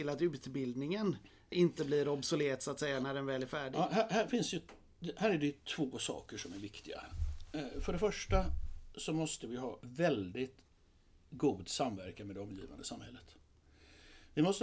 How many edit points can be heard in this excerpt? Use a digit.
0